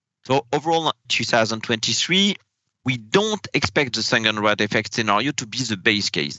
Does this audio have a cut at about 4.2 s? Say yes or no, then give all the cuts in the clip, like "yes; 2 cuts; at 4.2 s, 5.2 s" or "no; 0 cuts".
no; 2 cuts; at 1.0 s, 2.7 s